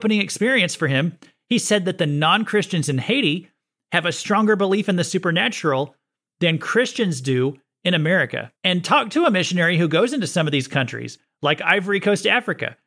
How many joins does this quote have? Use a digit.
1